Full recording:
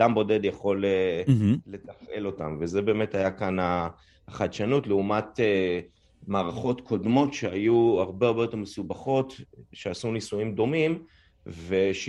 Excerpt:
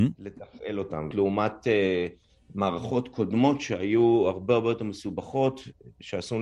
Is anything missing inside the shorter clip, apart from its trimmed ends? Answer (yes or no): yes